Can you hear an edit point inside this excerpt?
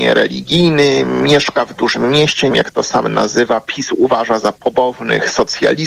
yes; 1 cut; at 2.5 s

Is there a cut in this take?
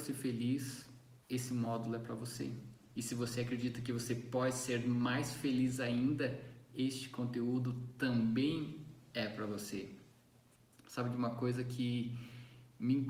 yes; 1 cut; at 1.2 s

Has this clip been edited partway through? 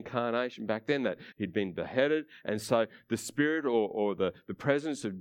yes; 1 cut; at 1.3 s

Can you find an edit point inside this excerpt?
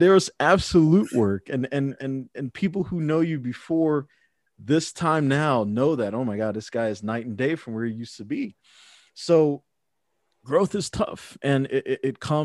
no; 0 cuts

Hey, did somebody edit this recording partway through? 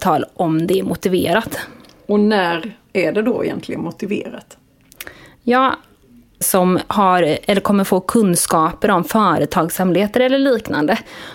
yes; 1 cut; at 6.4 s

